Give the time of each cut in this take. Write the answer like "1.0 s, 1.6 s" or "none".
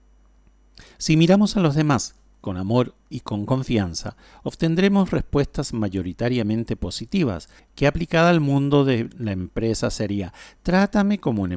7.6 s